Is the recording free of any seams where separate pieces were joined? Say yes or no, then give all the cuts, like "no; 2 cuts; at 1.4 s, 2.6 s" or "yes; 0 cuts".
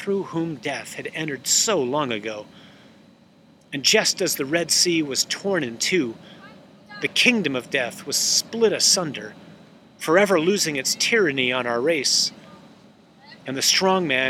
yes; 0 cuts